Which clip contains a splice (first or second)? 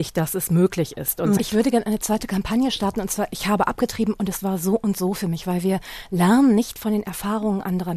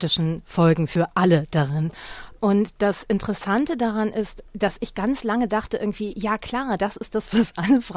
first